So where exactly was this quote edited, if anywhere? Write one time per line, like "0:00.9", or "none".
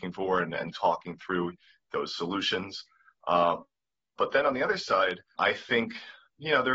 0:03.2
0:05.4